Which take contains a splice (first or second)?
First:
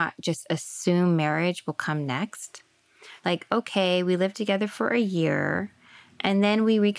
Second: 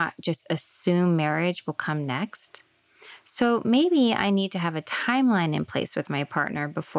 first